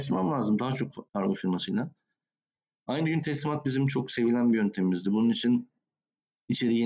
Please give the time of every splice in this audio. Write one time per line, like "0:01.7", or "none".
none